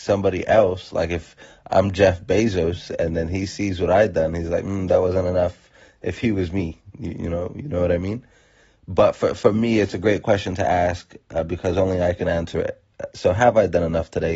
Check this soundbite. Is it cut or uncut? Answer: uncut